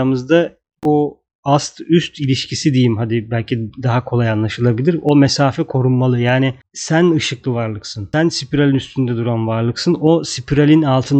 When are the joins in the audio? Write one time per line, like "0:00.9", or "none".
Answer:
none